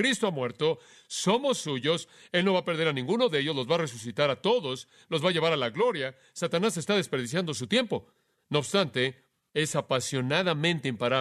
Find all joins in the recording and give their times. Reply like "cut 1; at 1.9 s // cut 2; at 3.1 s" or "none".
cut 1; at 2.3 s